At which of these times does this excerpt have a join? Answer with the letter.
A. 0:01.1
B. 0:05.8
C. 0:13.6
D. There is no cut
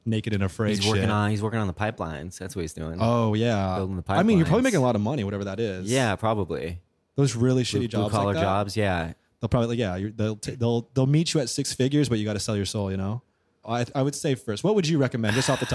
C